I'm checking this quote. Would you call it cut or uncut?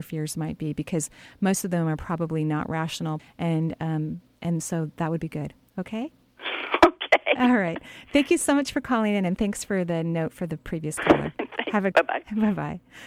cut